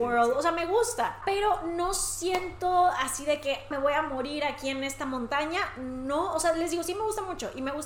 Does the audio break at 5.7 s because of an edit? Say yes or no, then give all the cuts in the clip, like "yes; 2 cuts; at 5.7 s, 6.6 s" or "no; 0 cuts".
no; 1 cut; at 3.7 s